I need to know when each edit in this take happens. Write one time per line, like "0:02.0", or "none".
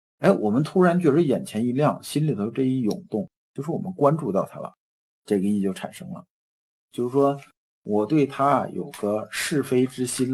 0:03.4
0:06.8